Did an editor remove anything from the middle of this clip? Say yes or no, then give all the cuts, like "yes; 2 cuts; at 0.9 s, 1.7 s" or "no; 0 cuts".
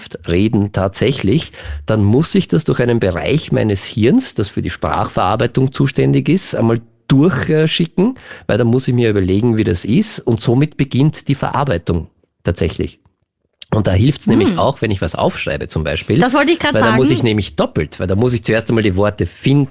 no; 0 cuts